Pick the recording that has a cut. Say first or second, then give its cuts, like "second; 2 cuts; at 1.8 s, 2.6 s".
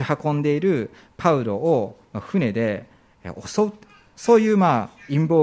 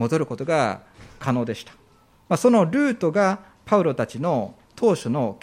second; 1 cut; at 2.3 s